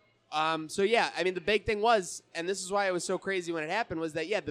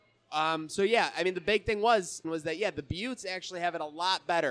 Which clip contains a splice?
second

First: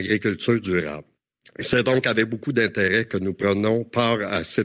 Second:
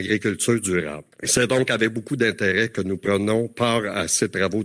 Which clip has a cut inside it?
second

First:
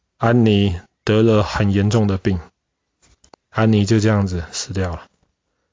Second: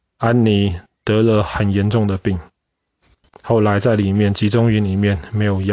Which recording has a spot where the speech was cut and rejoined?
first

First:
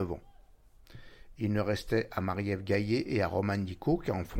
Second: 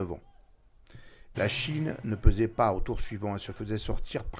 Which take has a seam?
second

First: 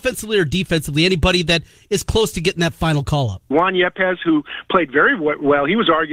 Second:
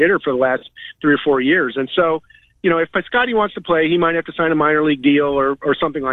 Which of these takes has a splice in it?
first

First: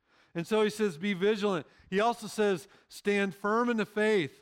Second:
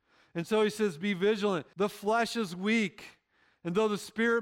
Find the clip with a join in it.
second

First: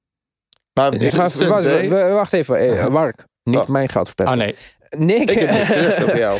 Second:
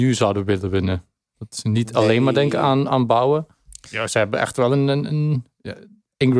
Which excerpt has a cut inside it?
first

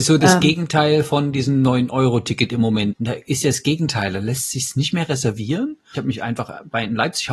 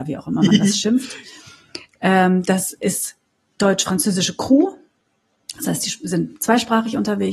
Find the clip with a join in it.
first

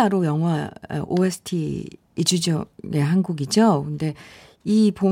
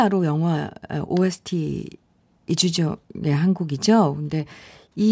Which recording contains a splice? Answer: first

